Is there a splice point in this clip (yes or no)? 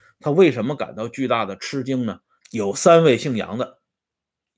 yes